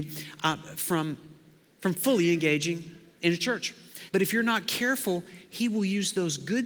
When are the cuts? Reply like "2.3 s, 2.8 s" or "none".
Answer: 4.1 s